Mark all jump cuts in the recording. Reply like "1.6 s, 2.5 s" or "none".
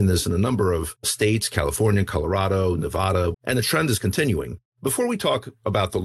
3.3 s, 4.7 s